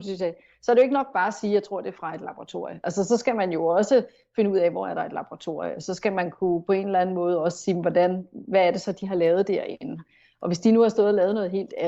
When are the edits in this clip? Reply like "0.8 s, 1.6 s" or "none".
none